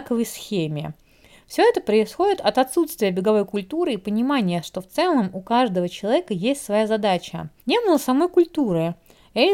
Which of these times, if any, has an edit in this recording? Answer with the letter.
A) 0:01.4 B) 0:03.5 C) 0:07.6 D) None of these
C